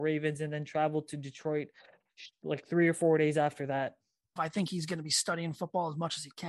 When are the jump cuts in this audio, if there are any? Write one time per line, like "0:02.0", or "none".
0:04.4